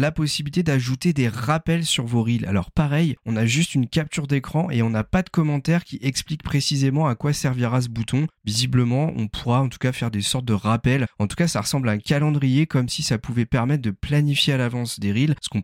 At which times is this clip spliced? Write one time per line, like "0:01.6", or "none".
none